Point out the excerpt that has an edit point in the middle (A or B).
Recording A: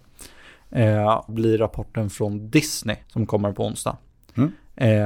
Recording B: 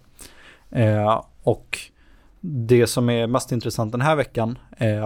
A